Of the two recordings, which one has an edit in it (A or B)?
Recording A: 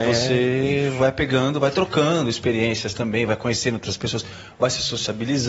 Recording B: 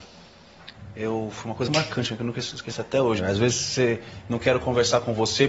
B